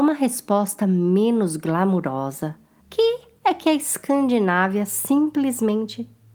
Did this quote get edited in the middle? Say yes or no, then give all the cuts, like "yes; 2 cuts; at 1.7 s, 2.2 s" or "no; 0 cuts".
yes; 1 cut; at 2.8 s